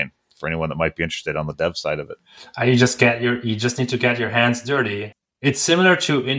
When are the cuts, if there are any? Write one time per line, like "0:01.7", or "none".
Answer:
none